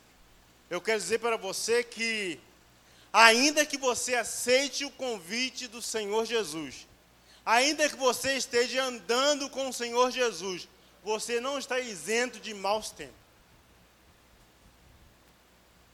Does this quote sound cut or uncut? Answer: uncut